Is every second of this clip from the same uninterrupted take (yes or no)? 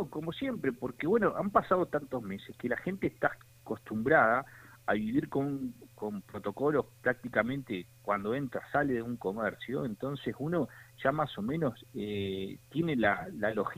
yes